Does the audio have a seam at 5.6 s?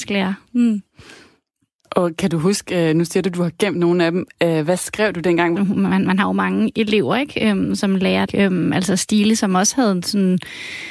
yes; 2 cuts; at 5.6 s, 8.3 s

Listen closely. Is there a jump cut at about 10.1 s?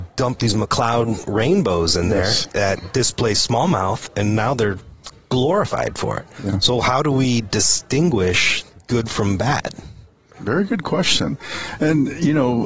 no; 0 cuts

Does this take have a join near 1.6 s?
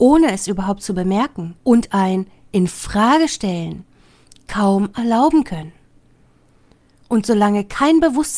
yes; 1 cut; at 1.6 s

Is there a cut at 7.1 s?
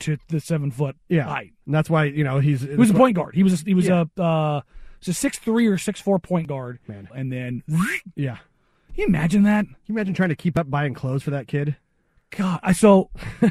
yes; 1 cut; at 7.1 s

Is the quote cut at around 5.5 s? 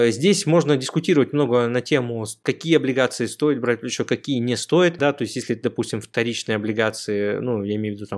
no; 0 cuts

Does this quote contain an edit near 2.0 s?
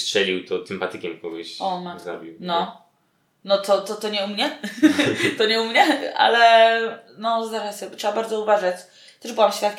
no; 0 cuts

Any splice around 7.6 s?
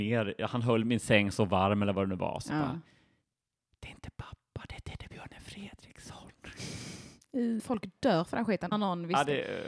yes; 2 cuts; at 7.6 s, 8.7 s

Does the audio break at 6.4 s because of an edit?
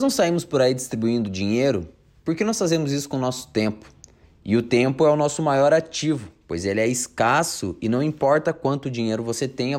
no; 1 cut; at 4.2 s

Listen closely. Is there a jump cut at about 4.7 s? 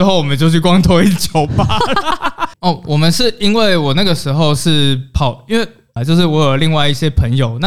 no; 2 cuts; at 2.5 s, 6.0 s

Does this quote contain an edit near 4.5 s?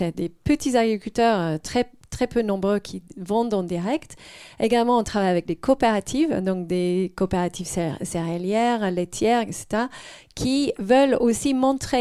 no; 0 cuts

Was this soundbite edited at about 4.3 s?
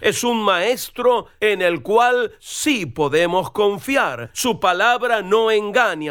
no; 0 cuts

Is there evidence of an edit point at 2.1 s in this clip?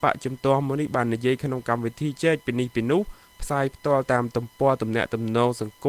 yes; 1 cut; at 2.1 s

